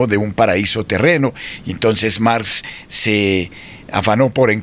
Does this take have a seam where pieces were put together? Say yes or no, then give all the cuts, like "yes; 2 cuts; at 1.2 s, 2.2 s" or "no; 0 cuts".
no; 0 cuts